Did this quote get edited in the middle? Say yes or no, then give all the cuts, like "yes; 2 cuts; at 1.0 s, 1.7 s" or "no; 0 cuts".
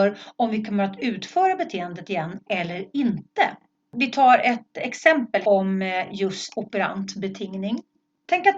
no; 0 cuts